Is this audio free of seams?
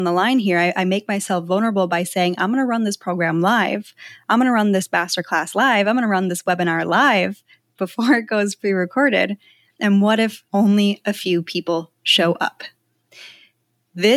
yes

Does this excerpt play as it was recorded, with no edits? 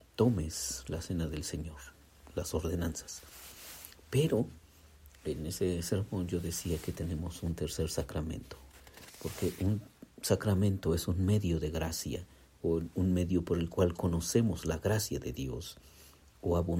yes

